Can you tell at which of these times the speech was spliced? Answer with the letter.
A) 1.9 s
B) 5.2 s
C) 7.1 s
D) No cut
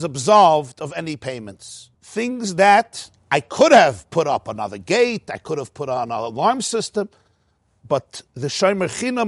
A